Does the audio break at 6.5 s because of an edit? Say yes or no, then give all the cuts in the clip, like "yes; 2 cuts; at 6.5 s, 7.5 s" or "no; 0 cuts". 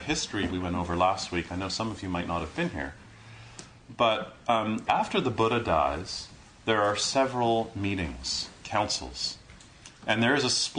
no; 1 cut; at 4.9 s